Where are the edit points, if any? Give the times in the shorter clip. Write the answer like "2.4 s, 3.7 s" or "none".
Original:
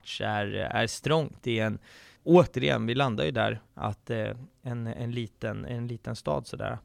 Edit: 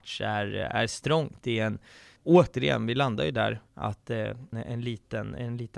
4.5 s

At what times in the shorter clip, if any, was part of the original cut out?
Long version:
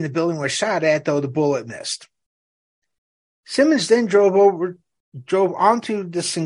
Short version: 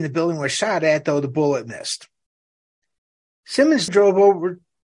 3.9 s

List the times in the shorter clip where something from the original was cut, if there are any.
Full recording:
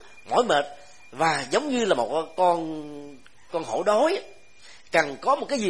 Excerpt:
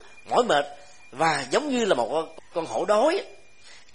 2.4 s

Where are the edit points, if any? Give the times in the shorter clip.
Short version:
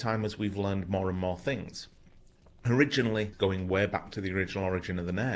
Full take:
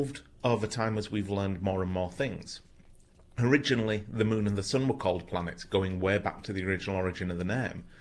3.3 s

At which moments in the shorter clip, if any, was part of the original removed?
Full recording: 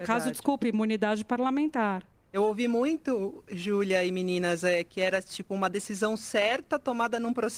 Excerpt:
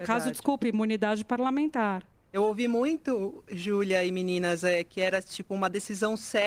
none

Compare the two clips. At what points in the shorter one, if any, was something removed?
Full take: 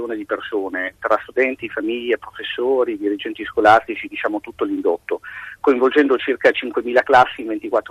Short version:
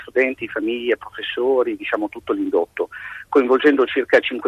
1.8 s

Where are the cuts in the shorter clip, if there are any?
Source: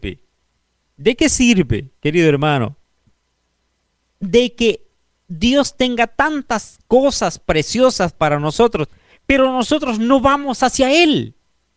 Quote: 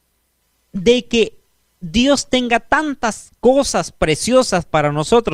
none

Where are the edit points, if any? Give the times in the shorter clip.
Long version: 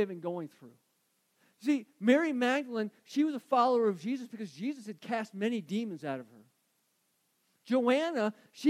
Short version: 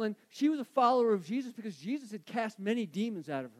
none

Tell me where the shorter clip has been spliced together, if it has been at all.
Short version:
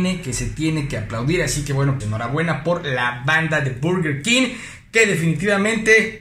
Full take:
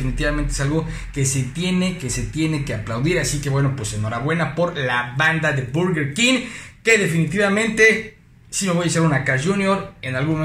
2.0 s

